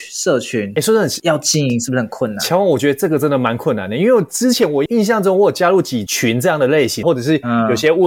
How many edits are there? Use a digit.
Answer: 2